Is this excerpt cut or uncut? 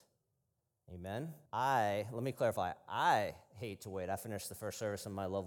cut